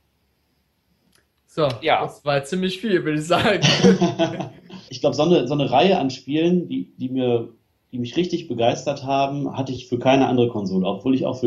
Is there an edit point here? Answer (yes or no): yes